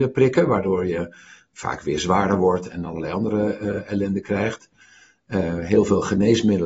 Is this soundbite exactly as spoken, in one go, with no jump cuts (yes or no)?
yes